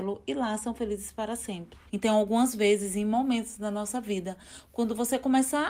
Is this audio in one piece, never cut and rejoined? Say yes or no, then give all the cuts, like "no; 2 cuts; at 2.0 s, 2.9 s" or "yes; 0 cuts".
no; 1 cut; at 1.9 s